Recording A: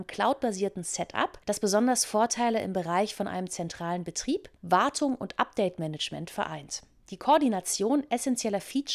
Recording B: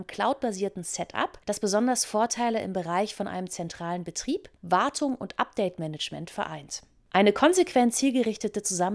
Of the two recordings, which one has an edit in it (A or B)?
A